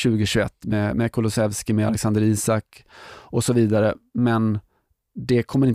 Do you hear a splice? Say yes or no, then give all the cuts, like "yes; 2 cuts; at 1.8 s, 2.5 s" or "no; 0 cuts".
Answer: no; 0 cuts